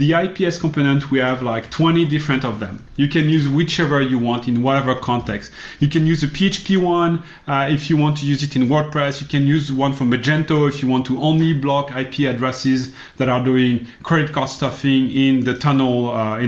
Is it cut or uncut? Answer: uncut